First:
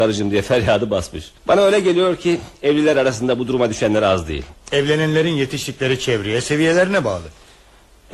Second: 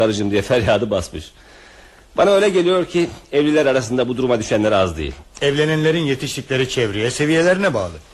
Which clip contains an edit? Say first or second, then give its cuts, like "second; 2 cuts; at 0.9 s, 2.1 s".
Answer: first; 1 cut; at 1.4 s